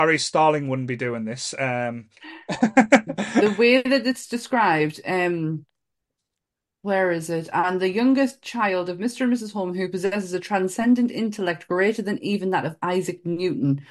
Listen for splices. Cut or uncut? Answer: uncut